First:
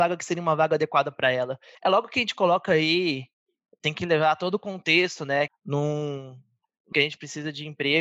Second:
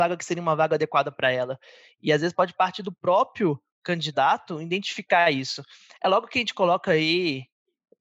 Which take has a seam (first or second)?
first